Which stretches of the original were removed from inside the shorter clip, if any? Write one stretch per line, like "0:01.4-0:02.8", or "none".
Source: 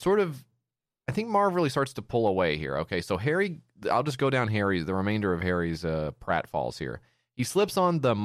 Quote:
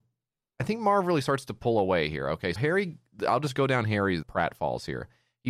0:03.0-0:03.2
0:04.9-0:06.1